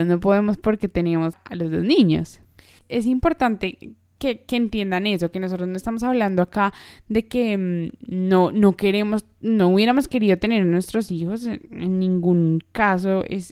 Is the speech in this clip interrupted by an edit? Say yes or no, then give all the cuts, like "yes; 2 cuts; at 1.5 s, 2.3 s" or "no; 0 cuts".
yes; 2 cuts; at 1.3 s, 2.8 s